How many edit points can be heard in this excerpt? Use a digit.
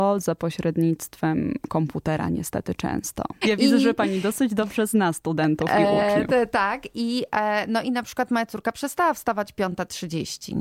1